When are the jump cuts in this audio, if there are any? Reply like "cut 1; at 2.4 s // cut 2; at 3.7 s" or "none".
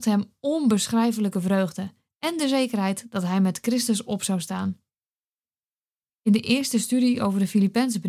none